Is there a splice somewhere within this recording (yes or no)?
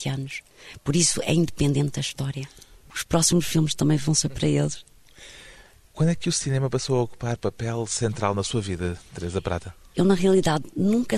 yes